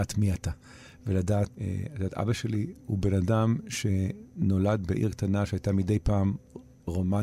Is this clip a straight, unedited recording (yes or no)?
no